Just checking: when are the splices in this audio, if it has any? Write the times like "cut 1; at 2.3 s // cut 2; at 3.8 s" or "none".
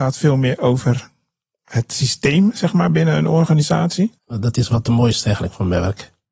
cut 1; at 4.2 s